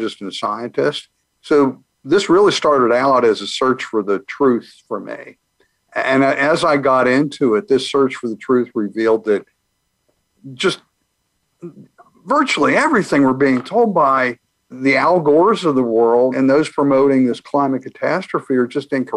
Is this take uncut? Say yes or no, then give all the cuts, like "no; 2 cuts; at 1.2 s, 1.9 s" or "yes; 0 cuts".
no; 3 cuts; at 1.3 s, 14.7 s, 16.3 s